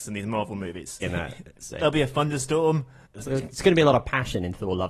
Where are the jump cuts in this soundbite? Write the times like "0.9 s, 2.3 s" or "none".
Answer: 1.0 s, 3.0 s